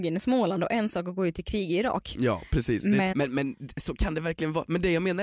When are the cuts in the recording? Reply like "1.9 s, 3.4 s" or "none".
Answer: 3.1 s